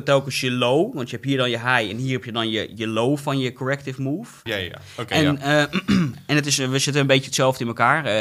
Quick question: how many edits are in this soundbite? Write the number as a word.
one